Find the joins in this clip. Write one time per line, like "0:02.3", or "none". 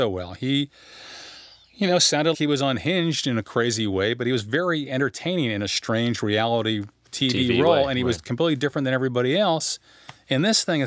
0:02.3